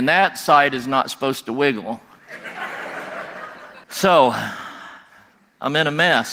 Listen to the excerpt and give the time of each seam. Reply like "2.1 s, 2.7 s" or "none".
3.8 s